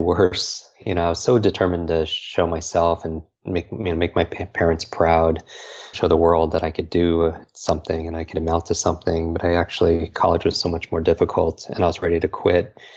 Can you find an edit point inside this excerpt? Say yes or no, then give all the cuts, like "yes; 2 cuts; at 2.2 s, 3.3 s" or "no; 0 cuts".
yes; 1 cut; at 5.9 s